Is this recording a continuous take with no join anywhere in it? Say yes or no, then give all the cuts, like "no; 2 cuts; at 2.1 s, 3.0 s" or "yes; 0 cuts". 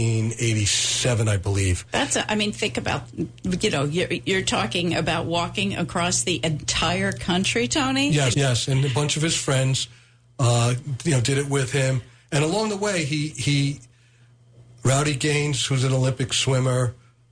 no; 1 cut; at 8.3 s